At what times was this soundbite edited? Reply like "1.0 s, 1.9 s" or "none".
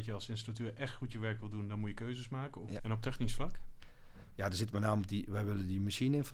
2.8 s